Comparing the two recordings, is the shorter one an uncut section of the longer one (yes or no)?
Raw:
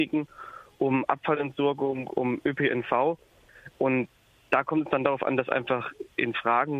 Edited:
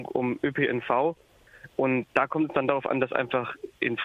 no